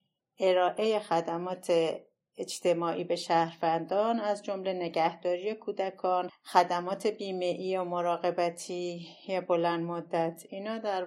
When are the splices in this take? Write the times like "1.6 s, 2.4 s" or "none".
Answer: 6.3 s